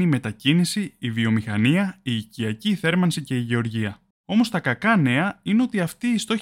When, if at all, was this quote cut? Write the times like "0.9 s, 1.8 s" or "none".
4.2 s